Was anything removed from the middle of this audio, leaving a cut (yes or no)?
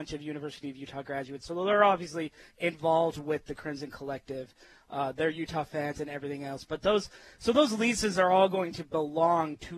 no